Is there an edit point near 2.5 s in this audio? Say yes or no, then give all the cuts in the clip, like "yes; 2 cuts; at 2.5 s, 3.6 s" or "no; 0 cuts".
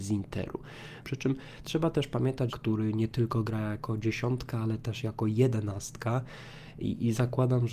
yes; 2 cuts; at 1.0 s, 2.5 s